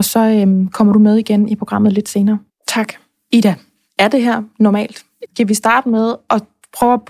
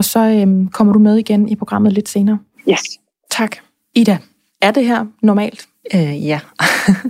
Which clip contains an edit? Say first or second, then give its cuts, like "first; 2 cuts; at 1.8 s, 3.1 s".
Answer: first; 2 cuts; at 2.5 s, 5.3 s